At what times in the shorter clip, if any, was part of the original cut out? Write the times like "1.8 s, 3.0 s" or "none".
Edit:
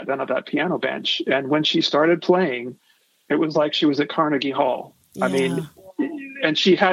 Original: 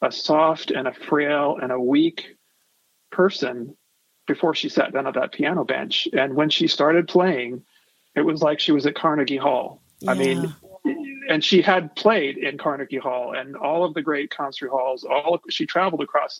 none